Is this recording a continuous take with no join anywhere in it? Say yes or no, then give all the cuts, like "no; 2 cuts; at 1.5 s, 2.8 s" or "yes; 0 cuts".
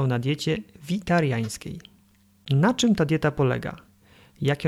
yes; 0 cuts